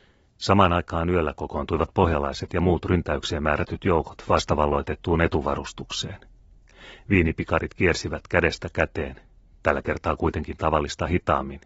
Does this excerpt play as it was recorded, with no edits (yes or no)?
yes